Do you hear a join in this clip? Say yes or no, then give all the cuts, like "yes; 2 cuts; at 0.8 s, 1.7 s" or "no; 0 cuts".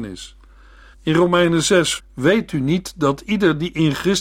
yes; 2 cuts; at 0.9 s, 2.0 s